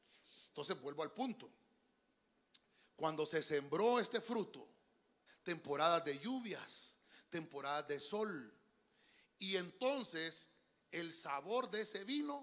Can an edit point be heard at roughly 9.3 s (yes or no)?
no